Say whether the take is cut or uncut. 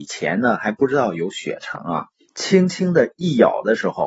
cut